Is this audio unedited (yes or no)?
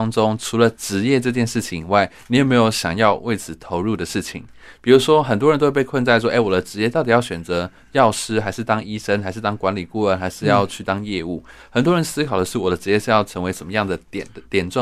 yes